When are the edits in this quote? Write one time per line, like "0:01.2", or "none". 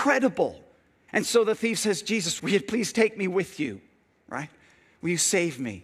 0:01.1
0:02.4